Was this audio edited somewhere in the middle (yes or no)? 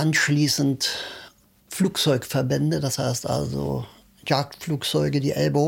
no